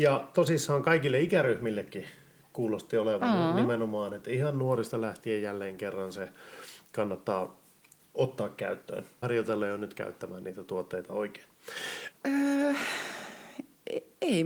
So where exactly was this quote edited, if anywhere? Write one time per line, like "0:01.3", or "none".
0:09.2
0:12.1